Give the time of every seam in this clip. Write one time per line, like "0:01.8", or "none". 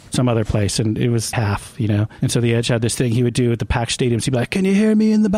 0:01.3